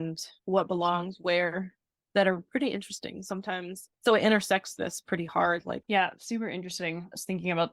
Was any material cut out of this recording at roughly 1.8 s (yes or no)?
no